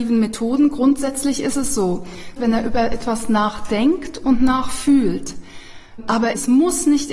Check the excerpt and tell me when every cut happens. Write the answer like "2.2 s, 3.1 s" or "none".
2.4 s